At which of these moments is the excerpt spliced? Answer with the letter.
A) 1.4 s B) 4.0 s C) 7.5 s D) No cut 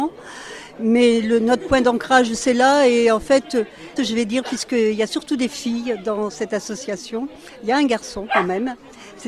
B